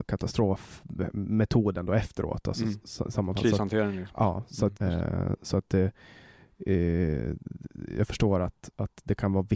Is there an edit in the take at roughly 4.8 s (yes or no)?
yes